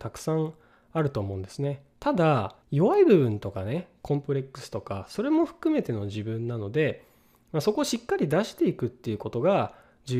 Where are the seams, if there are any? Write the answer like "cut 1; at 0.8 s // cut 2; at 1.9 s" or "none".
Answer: cut 1; at 2.6 s